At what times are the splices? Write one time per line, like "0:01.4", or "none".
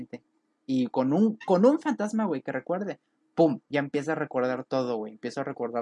none